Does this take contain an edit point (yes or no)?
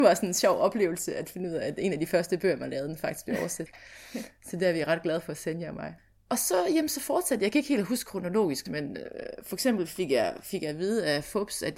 yes